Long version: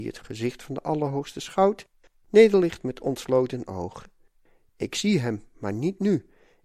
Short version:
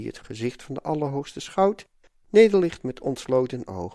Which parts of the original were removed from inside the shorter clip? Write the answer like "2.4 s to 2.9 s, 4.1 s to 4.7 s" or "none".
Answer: none